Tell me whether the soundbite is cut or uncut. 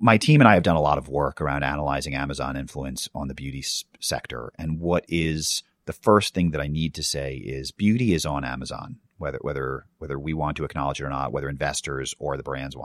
uncut